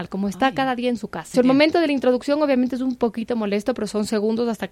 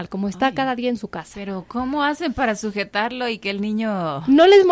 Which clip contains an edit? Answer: first; 1 cut; at 1.3 s

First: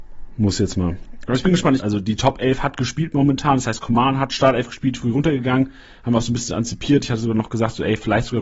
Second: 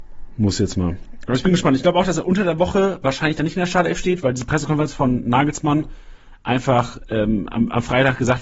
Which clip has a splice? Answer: first; 1 cut; at 1.8 s

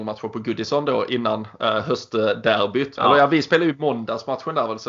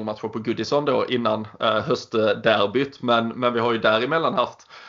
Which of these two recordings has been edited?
first; 1 cut; at 3.0 s

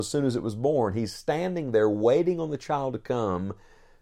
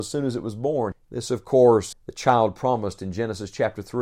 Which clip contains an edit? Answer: second; 2 cuts; at 0.9 s, 1.9 s

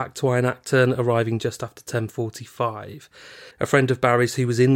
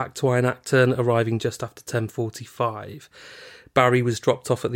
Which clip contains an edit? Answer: first; 1 cut; at 3.5 s

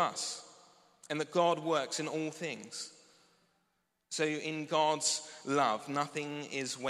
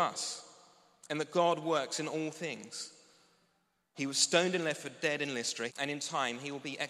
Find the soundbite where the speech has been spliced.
second; 2 cuts; at 3.9 s, 5.7 s

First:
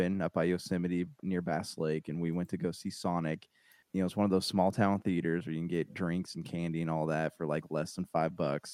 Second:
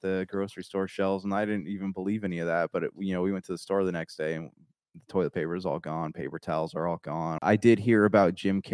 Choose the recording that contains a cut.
second; 1 cut; at 7.4 s

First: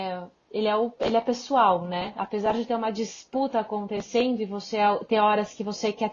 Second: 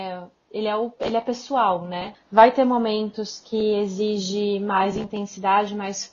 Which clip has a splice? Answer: second; 1 cut; at 2.1 s

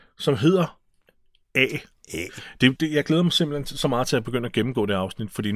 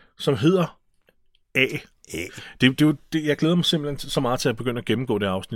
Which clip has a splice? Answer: first; 1 cut; at 2.8 s

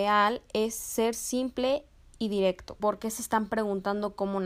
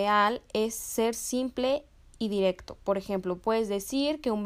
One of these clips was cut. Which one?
first; 1 cut; at 2.8 s

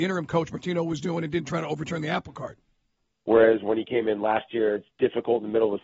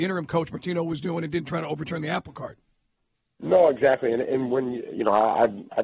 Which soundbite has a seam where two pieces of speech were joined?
first; 1 cut; at 3.1 s

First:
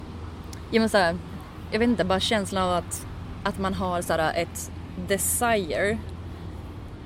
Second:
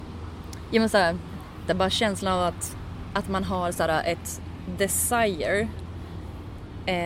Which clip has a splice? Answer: second; 1 cut; at 1.7 s

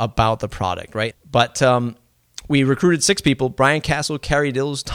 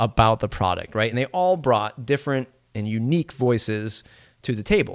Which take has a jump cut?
first; 1 cut; at 1.1 s

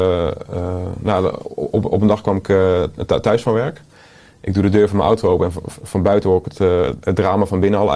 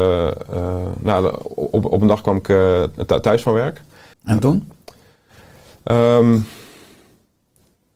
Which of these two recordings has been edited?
second; 1 cut; at 4.1 s

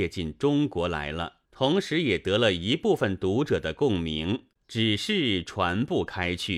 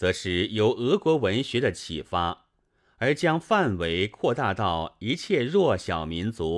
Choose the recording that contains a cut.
first; 2 cuts; at 1.4 s, 4.6 s

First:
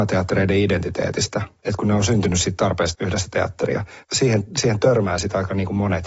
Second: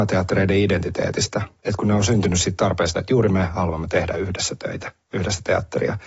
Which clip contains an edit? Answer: first; 2 cuts; at 2.9 s, 4.0 s

